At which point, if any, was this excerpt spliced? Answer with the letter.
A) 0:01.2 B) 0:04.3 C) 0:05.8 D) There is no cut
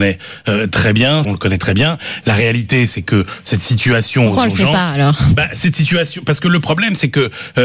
A